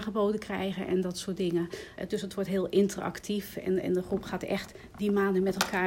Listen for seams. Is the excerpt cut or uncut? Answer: uncut